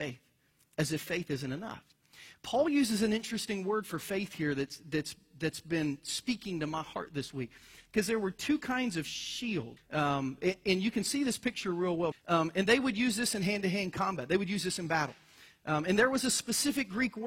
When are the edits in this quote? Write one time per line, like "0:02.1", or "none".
0:09.8
0:12.1

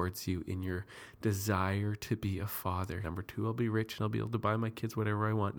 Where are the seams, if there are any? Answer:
0:03.0

